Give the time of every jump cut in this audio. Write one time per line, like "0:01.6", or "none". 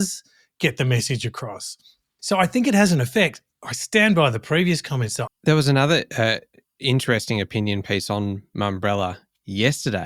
0:05.3